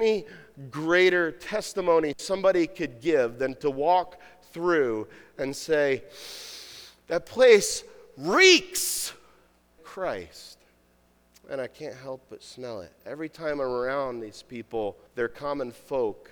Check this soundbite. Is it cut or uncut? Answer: cut